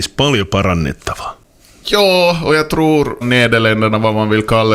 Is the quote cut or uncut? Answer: cut